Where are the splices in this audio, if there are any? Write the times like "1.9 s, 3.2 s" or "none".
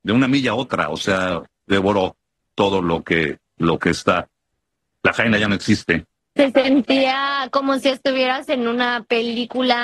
1.5 s